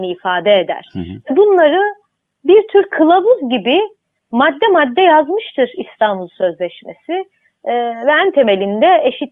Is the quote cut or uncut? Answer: uncut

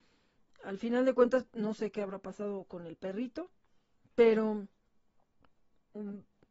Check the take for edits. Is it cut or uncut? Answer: cut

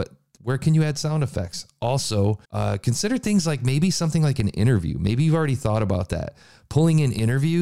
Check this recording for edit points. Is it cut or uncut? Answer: cut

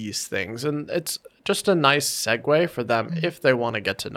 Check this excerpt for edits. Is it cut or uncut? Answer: uncut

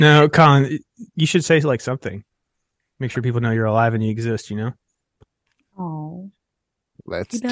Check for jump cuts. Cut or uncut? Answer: uncut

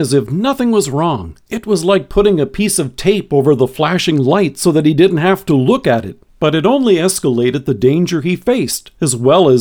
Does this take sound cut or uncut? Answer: cut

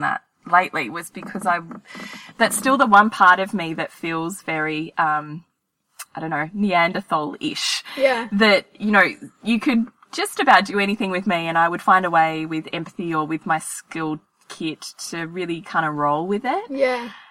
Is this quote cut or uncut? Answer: uncut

